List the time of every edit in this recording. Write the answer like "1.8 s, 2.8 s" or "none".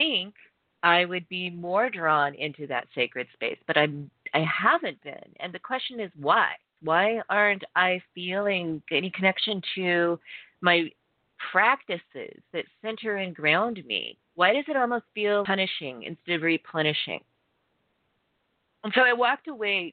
6.8 s, 14.2 s, 15.5 s